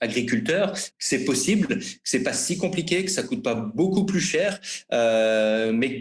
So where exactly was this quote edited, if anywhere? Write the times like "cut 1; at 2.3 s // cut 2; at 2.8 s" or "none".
cut 1; at 0.9 s